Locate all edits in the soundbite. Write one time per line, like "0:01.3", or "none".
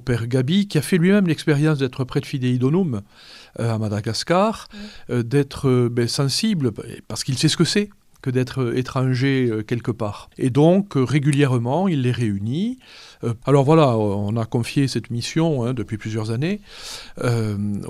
0:10.3
0:13.4